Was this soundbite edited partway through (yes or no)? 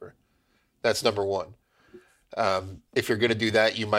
yes